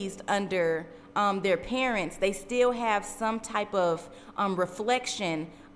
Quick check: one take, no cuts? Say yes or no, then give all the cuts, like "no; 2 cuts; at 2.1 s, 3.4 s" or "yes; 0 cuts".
yes; 0 cuts